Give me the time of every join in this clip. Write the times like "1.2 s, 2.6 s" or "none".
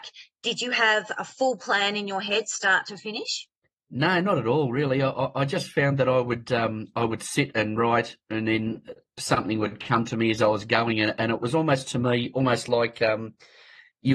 none

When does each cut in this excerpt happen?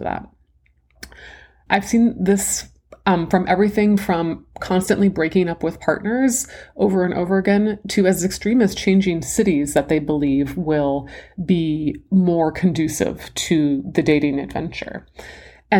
1.7 s

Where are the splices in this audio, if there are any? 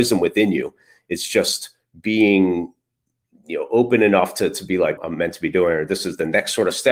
5.0 s

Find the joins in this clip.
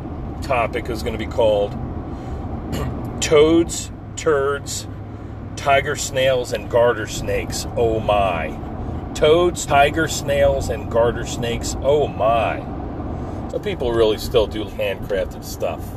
9.7 s, 13.5 s, 14.7 s

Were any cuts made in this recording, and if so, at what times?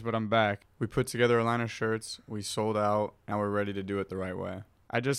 3.3 s

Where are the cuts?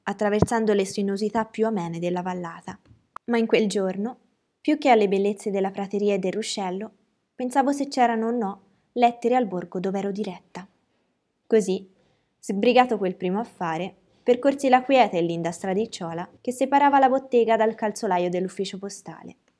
11.4 s, 16.4 s

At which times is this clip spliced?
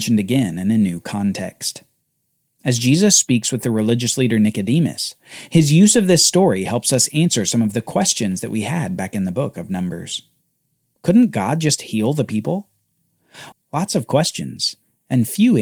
11.0 s, 13.5 s

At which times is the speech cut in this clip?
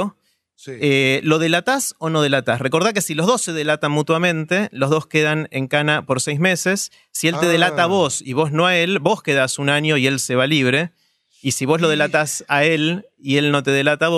none

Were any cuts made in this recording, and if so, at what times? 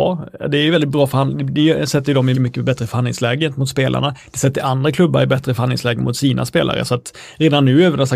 2.3 s

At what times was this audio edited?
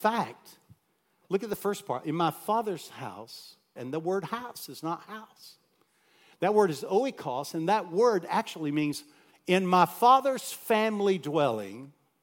3.8 s

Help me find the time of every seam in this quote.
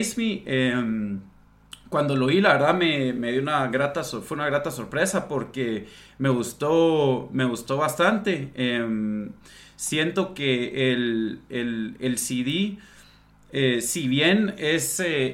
none

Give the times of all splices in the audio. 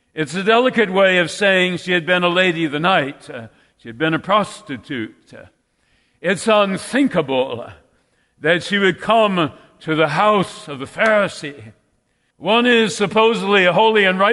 12.3 s

